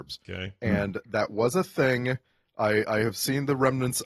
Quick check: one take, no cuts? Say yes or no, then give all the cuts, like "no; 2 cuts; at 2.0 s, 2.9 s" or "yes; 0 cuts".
yes; 0 cuts